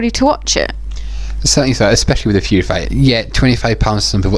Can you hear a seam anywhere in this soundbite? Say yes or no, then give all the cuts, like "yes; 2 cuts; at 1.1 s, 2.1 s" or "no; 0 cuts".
yes; 1 cut; at 2.9 s